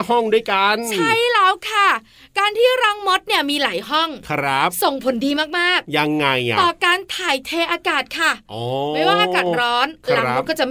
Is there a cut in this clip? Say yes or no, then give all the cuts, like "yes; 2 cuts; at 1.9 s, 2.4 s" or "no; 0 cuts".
no; 0 cuts